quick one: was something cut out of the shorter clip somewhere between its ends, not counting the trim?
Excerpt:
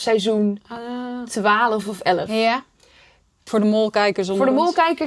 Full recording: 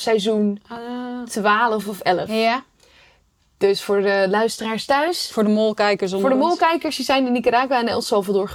yes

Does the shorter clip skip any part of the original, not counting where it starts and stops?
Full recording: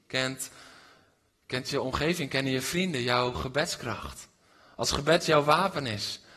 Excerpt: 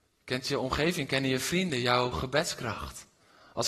no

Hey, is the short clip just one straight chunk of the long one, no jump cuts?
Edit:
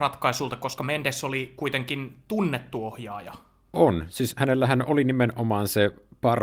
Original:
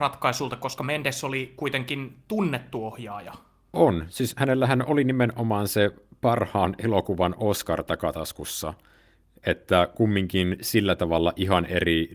yes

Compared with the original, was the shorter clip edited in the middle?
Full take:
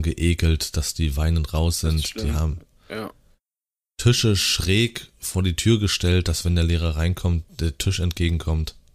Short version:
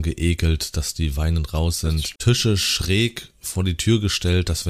yes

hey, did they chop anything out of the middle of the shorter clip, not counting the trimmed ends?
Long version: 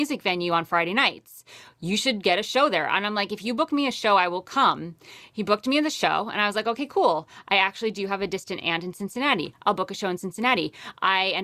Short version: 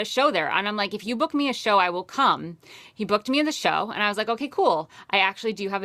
no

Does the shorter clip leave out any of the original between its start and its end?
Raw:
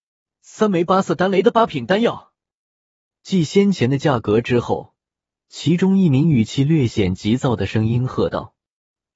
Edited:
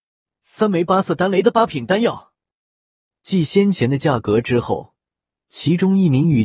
no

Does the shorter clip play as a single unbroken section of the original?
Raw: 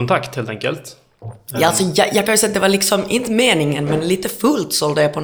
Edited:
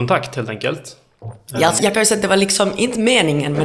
no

